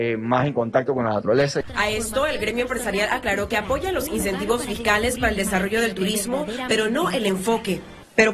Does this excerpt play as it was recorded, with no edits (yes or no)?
yes